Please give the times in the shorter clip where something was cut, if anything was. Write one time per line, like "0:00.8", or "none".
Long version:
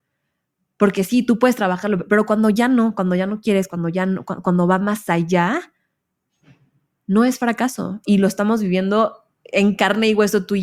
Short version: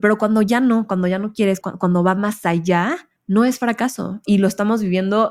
0:01.6
0:03.2